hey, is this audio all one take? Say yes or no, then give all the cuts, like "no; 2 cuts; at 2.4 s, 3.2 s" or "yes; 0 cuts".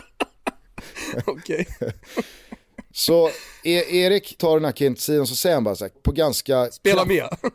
no; 2 cuts; at 4.4 s, 5.9 s